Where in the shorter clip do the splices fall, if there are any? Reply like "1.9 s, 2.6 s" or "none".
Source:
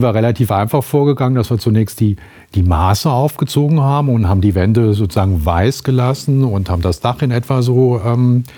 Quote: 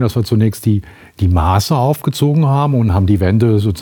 none